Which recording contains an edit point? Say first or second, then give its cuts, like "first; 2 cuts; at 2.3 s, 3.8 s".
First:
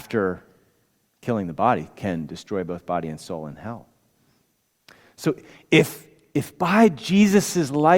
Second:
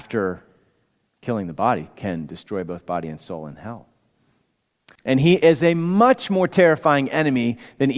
second; 1 cut; at 4.9 s